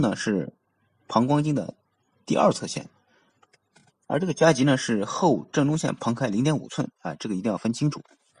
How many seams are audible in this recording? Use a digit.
0